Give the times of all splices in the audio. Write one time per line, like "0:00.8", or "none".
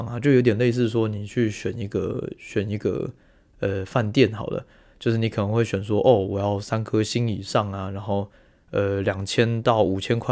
none